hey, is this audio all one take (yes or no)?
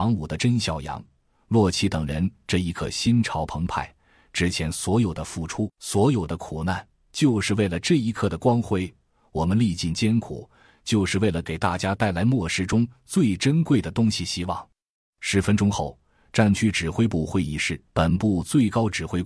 no